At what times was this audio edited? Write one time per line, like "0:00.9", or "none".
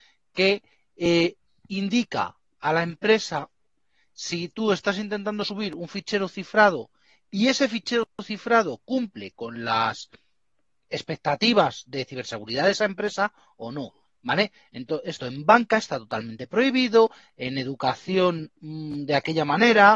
none